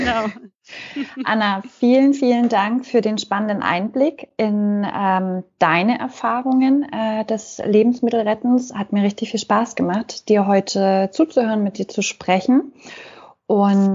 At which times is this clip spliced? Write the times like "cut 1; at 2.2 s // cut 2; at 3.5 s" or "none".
none